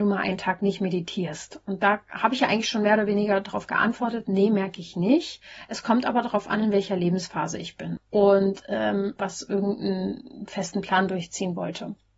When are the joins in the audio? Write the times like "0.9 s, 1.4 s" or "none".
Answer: 8.0 s, 9.2 s